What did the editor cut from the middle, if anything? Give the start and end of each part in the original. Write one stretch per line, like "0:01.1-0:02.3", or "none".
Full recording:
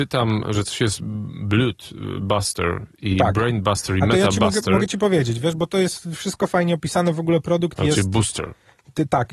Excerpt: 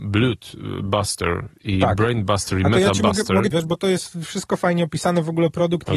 0:04.9-0:05.4